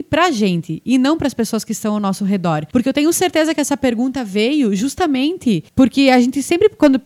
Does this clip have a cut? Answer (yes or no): no